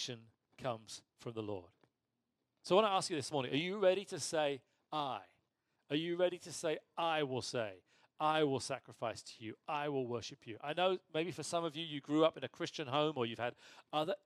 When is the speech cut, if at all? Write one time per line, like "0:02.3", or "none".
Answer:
none

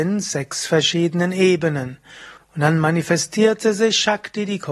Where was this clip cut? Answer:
0:02.4

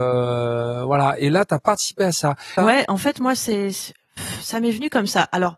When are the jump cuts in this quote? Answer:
0:02.6

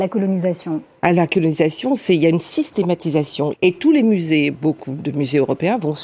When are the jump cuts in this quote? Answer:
0:03.5

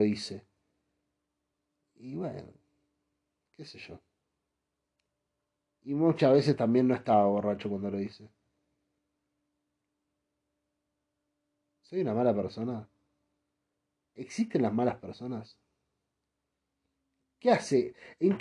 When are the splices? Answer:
none

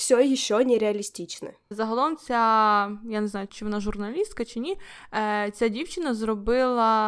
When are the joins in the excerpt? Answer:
0:01.7
0:03.5

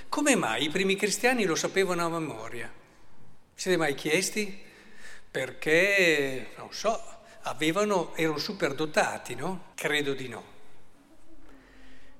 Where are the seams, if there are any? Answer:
0:09.7

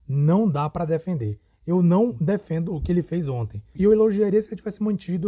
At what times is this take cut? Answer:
0:03.8

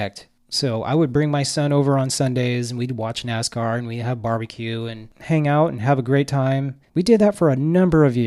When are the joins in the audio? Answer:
0:06.9

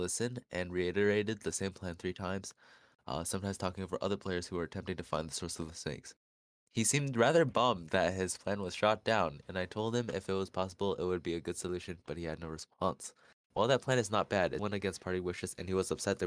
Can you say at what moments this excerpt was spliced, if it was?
0:13.4
0:14.6

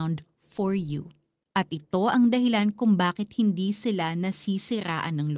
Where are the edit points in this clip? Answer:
0:01.5

